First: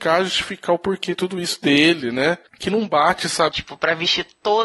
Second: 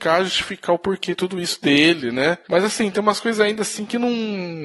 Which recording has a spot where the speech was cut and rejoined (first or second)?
first